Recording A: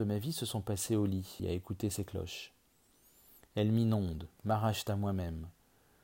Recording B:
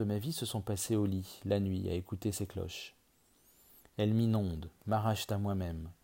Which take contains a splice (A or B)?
A